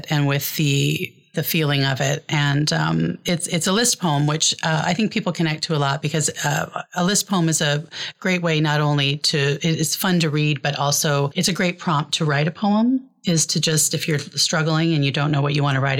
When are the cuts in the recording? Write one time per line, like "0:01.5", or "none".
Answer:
none